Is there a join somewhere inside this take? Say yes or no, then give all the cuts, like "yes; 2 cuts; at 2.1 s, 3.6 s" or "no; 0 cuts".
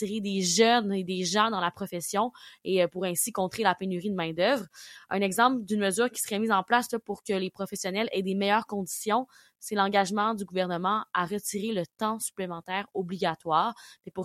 no; 0 cuts